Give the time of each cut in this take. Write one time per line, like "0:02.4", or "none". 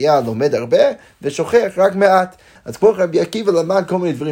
0:02.6